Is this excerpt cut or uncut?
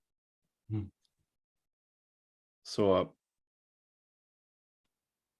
uncut